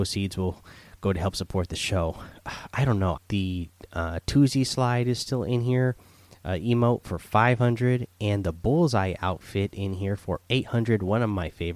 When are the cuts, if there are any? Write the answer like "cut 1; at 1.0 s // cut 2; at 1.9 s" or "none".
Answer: cut 1; at 3.2 s